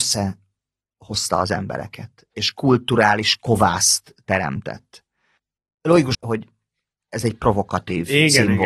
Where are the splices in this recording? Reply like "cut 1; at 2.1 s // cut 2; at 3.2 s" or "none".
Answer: cut 1; at 6.1 s